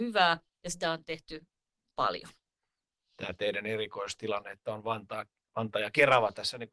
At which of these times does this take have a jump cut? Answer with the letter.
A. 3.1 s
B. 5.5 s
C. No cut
C